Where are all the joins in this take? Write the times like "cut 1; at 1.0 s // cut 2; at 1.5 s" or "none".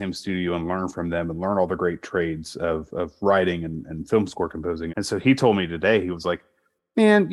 cut 1; at 4.9 s